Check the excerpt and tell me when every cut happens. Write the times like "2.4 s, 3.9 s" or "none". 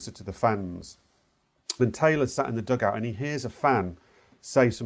none